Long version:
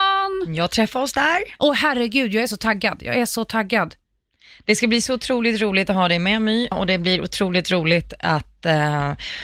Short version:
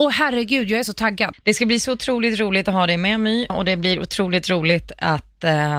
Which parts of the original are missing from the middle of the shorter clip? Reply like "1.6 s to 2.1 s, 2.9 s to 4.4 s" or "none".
3.0 s to 4.6 s